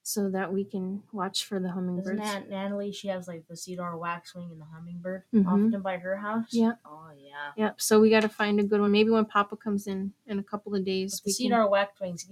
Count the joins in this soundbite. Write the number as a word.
zero